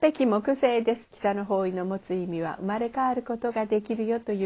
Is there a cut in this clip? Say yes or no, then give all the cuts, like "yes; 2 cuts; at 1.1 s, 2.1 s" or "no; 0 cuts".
yes; 1 cut; at 1.0 s